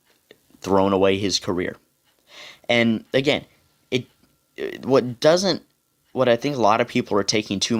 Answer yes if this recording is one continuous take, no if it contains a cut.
yes